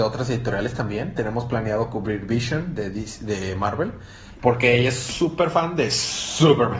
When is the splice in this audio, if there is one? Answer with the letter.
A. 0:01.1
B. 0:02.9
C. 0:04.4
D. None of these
C